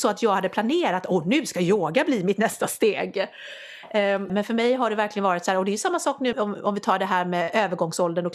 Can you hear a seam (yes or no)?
yes